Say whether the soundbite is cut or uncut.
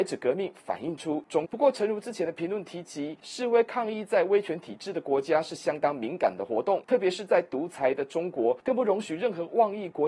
cut